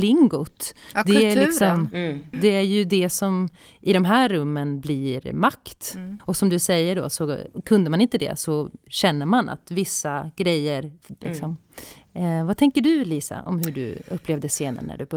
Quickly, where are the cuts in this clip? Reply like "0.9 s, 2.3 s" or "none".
2.3 s, 6.2 s, 11.2 s